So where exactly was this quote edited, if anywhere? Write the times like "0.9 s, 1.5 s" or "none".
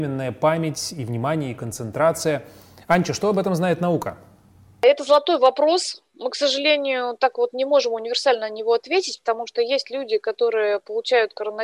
none